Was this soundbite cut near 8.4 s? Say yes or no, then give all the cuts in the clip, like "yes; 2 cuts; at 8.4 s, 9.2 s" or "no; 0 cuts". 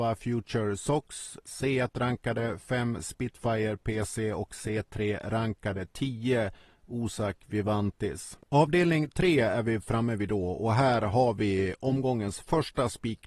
yes; 1 cut; at 8.4 s